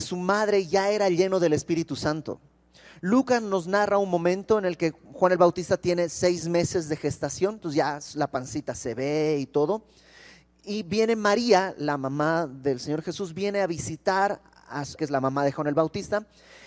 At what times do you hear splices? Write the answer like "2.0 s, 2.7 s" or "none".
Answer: 15.0 s